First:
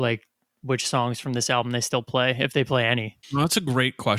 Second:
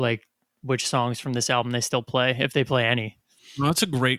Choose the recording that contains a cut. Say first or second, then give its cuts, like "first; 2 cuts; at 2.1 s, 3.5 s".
first; 1 cut; at 3.2 s